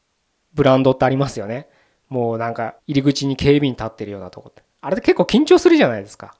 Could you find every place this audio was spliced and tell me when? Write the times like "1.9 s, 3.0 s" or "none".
2.8 s

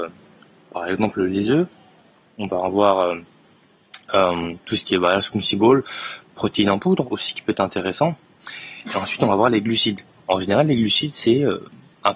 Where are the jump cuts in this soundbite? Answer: none

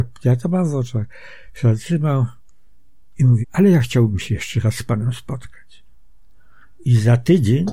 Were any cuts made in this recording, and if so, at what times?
3.4 s

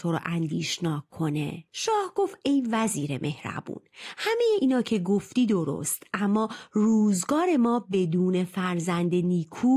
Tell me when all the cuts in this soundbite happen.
none

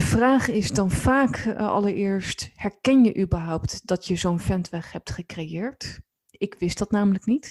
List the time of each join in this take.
3.8 s

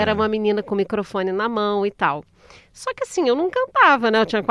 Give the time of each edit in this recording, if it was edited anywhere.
none

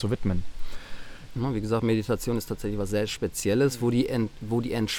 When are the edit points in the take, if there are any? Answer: 1.4 s

